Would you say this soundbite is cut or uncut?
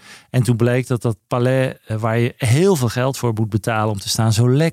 uncut